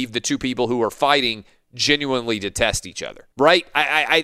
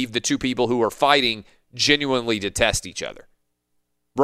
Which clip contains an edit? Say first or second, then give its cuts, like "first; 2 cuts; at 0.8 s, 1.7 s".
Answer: first; 1 cut; at 3.3 s